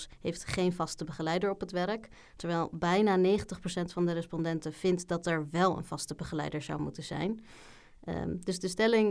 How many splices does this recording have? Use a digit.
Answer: 0